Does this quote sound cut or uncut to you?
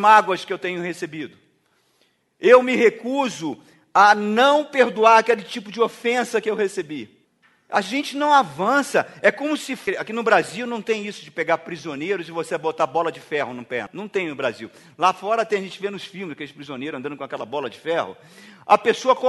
uncut